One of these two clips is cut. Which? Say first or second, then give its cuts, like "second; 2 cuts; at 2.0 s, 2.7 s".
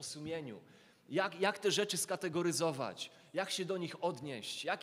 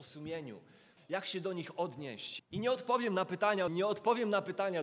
second; 3 cuts; at 1.0 s, 2.4 s, 3.7 s